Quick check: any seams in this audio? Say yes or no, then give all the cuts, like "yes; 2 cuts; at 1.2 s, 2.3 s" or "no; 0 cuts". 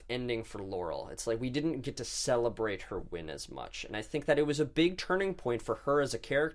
no; 0 cuts